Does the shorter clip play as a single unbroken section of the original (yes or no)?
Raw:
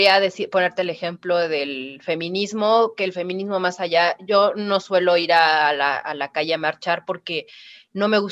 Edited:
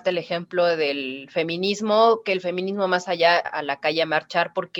no